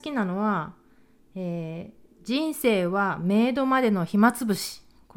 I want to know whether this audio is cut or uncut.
uncut